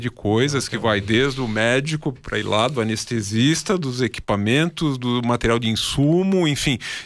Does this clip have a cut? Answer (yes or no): no